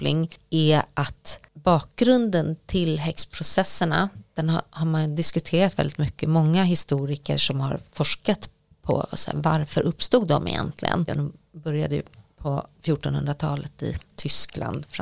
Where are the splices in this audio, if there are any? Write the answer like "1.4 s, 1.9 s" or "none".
11.1 s